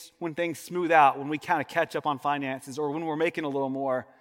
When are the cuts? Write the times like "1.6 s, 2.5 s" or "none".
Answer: none